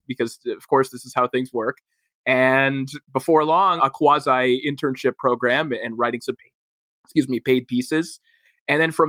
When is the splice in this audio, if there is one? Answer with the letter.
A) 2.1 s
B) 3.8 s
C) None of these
B